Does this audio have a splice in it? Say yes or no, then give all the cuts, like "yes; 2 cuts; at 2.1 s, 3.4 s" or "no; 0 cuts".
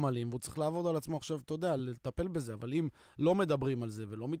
no; 0 cuts